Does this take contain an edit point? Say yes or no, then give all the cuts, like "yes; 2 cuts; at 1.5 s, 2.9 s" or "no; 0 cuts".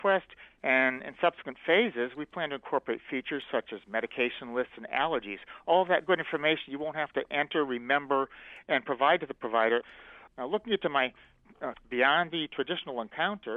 yes; 2 cuts; at 10.3 s, 11.7 s